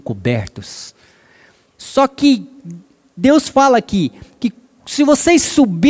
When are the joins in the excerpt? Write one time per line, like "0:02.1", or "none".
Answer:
0:01.7